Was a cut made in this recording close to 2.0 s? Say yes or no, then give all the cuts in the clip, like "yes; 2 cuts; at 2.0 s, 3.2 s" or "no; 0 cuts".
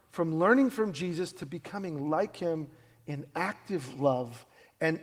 no; 0 cuts